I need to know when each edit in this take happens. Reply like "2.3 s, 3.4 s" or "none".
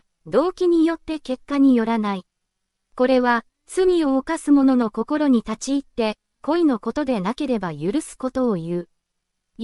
6.3 s